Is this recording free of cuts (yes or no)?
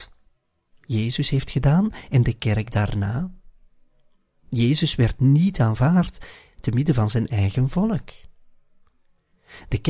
yes